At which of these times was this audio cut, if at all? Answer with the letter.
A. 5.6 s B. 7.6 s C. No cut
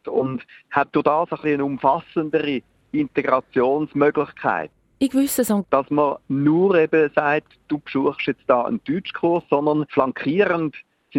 A